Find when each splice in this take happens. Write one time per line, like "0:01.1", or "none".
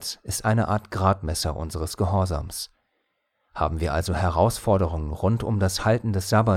none

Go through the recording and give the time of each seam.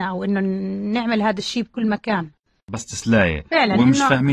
none

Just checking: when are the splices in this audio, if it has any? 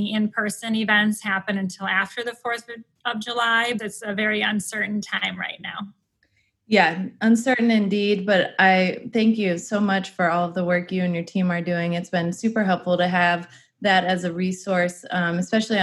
0:03.8

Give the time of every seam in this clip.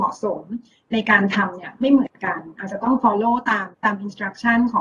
0:03.7

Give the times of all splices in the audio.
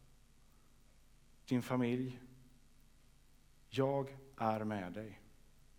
none

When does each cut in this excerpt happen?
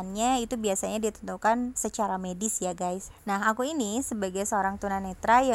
0:01.8
0:03.2

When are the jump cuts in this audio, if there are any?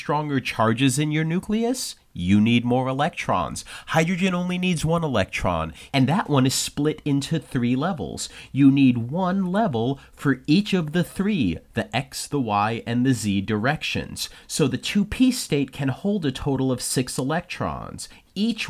0:05.9

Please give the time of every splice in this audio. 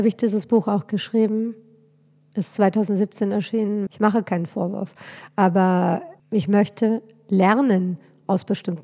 0:03.9
0:06.2

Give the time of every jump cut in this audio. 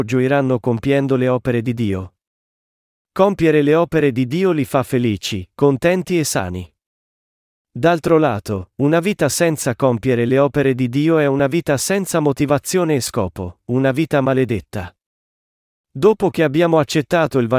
none

